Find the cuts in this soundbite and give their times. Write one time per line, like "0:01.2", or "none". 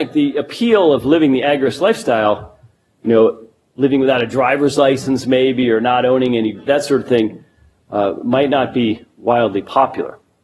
0:06.7